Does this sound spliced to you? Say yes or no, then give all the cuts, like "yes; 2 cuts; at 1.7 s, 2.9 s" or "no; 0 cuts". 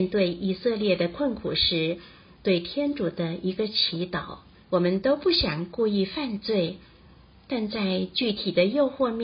yes; 1 cut; at 4.6 s